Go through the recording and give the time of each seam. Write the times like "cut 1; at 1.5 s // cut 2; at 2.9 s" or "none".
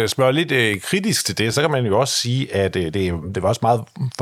none

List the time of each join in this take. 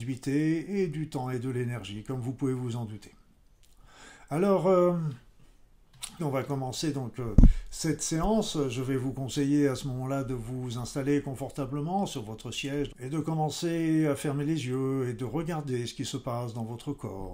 cut 1; at 6.2 s // cut 2; at 12.9 s

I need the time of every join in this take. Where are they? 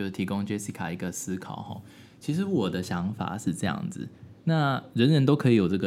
none

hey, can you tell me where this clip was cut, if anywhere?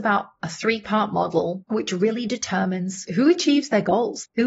none

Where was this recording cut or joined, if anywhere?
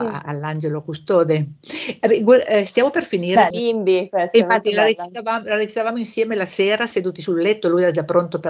cut 1; at 3.5 s

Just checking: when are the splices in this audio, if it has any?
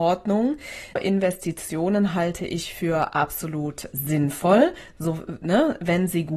cut 1; at 1.0 s // cut 2; at 3.9 s

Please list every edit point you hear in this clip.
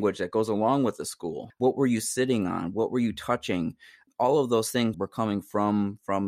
cut 1; at 1.5 s // cut 2; at 4.9 s

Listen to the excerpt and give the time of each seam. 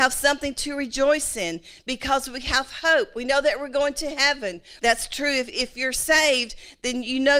cut 1; at 4.8 s

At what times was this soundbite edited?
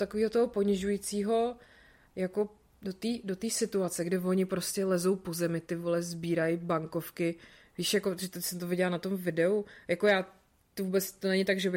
none

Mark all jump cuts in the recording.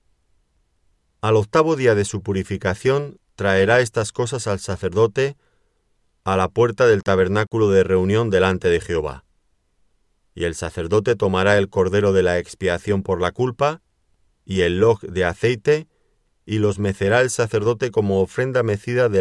none

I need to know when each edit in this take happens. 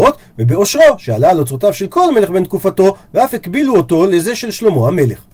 none

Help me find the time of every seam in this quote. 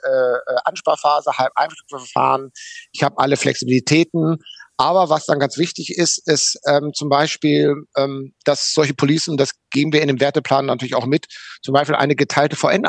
none

